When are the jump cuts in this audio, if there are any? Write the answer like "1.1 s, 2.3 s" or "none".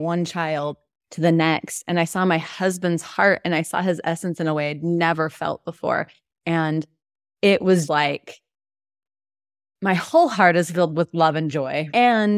6.4 s, 7.9 s